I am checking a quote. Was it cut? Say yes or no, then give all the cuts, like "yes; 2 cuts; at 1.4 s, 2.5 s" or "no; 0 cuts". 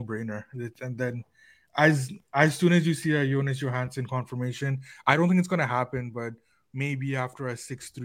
no; 0 cuts